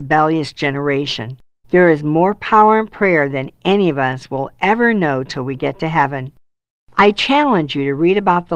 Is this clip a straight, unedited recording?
no; 1 cut; at 1.6 s

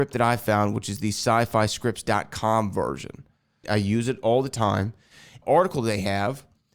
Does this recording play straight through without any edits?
no; 2 cuts; at 3.6 s, 5.4 s

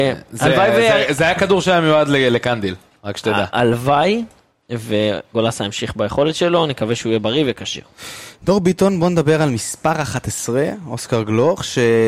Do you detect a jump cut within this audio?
no; 0 cuts

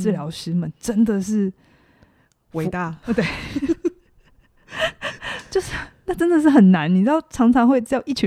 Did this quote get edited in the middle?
no; 0 cuts

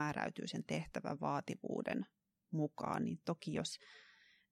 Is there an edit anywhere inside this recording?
no; 0 cuts

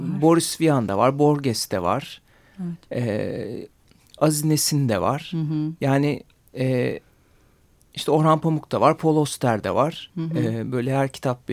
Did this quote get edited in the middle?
yes; 1 cut; at 10.1 s

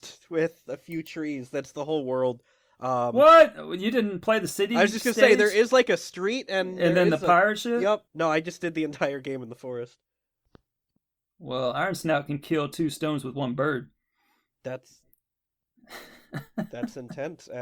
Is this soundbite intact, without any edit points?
no; 1 cut; at 8.1 s

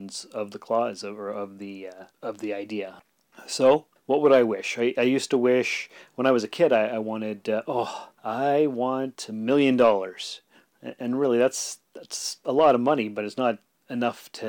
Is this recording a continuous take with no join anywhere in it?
no; 1 cut; at 8.1 s

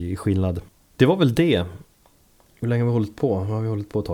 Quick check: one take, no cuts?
yes; 0 cuts

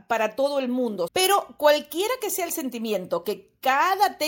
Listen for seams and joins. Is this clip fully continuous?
no; 1 cut; at 1.1 s

